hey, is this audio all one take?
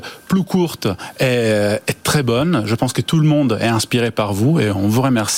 yes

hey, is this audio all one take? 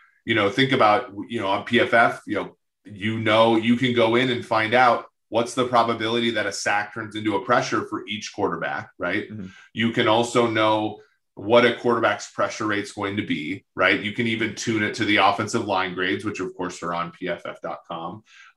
yes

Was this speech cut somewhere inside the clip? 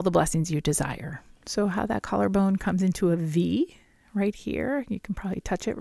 yes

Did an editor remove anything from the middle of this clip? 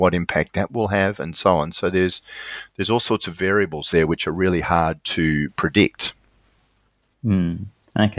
no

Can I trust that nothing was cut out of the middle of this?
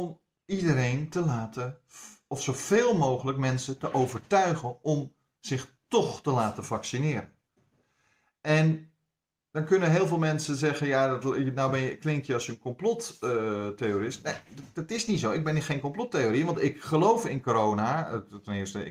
yes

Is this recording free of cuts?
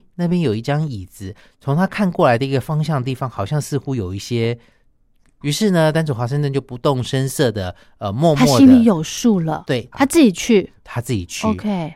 no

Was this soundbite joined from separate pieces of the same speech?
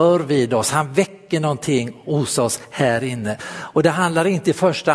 yes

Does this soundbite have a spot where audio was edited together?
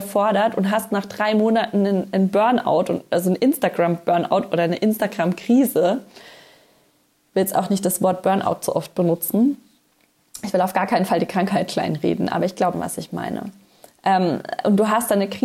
yes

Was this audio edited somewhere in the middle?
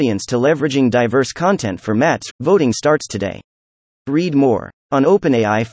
yes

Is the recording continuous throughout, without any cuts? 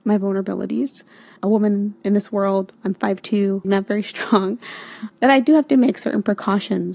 no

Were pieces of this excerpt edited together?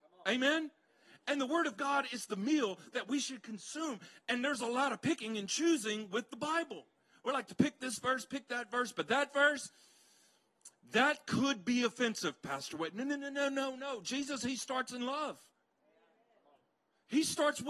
no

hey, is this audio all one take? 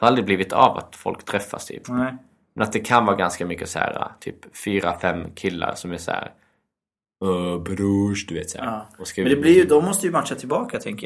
yes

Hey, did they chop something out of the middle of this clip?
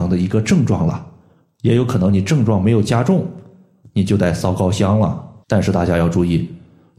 yes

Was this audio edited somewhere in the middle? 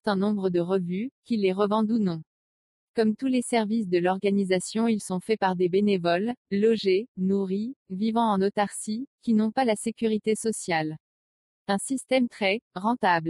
yes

